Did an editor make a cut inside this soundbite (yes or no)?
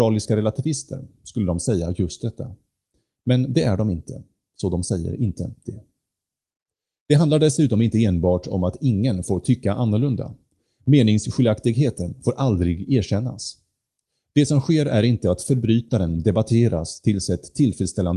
no